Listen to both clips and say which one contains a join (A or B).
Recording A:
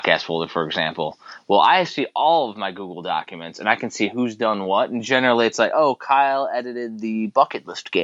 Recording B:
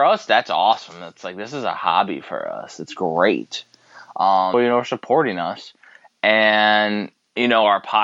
B